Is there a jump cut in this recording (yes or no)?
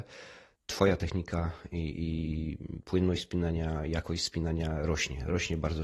no